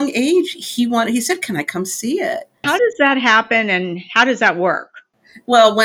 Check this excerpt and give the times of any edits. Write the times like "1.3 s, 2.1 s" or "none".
2.6 s